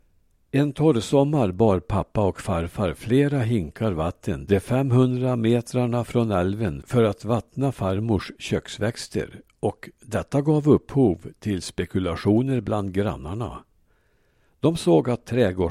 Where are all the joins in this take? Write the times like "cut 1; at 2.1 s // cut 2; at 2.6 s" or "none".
none

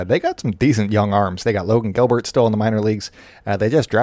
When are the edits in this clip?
none

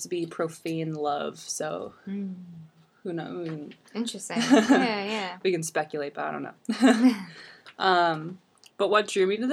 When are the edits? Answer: none

